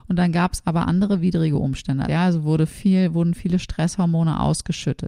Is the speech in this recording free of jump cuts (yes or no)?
no